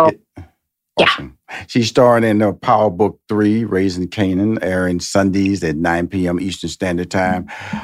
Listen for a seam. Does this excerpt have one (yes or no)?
no